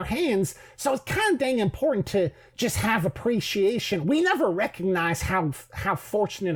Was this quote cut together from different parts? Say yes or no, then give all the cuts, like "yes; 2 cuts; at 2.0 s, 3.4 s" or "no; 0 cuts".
no; 0 cuts